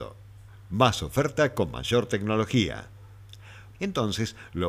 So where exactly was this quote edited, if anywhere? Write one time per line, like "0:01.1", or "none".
0:03.7